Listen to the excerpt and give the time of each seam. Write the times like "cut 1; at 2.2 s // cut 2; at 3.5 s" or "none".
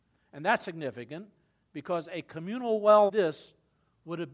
cut 1; at 3.1 s